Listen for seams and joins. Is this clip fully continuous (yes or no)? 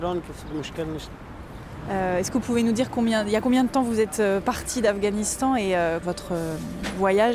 no